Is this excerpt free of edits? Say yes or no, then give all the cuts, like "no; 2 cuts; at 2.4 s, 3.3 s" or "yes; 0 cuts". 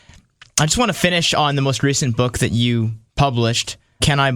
yes; 0 cuts